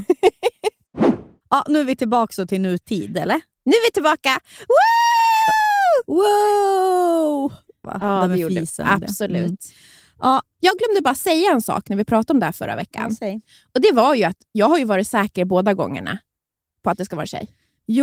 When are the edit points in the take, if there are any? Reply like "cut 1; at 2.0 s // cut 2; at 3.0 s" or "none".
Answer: cut 1; at 7.8 s